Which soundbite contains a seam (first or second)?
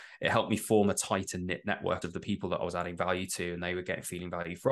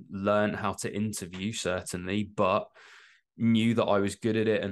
first